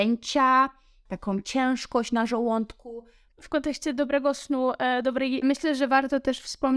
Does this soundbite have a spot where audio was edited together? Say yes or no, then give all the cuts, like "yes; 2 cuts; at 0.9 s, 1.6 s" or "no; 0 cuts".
yes; 2 cuts; at 3.3 s, 5.4 s